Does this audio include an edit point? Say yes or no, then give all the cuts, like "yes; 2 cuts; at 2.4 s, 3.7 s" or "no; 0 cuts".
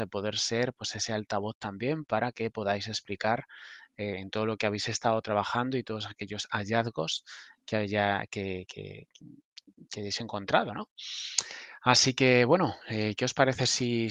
no; 0 cuts